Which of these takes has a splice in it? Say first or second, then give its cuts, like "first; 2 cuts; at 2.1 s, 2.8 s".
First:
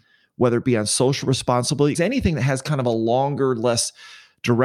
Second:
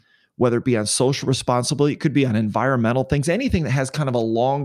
first; 1 cut; at 1.9 s